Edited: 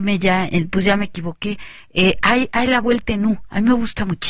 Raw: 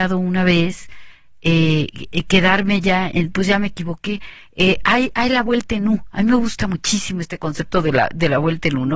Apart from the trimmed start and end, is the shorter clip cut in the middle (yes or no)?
no